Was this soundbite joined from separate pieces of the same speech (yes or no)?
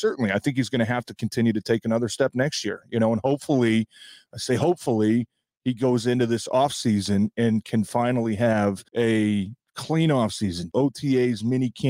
yes